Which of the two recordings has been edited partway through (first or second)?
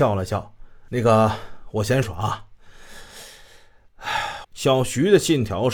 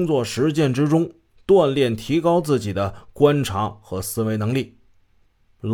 first